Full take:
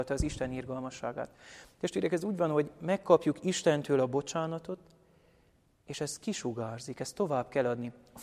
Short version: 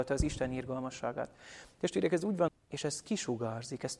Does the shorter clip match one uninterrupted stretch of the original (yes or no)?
no